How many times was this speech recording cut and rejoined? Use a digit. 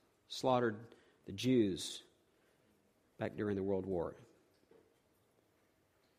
0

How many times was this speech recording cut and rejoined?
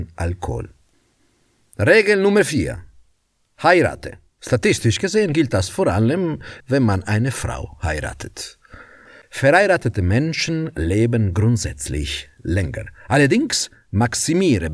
2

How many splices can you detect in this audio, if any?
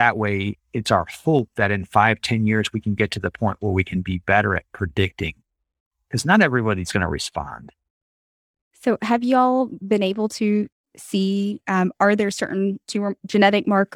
0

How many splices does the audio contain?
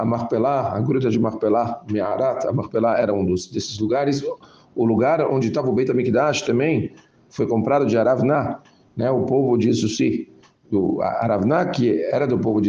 0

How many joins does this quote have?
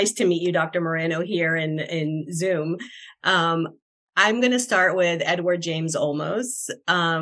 0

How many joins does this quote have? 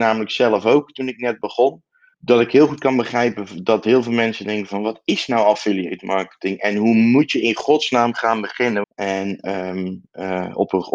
2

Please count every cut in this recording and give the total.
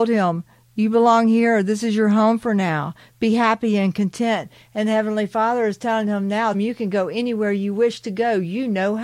1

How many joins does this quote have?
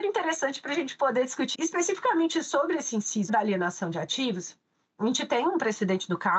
2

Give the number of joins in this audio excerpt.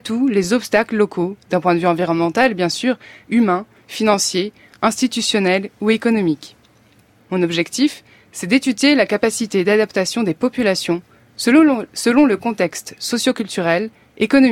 2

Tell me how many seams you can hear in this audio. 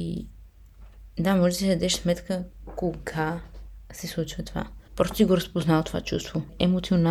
1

